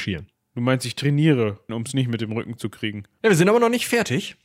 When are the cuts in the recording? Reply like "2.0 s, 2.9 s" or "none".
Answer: 1.7 s, 3.2 s